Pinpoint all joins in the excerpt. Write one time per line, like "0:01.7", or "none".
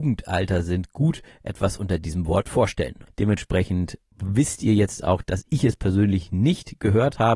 0:03.1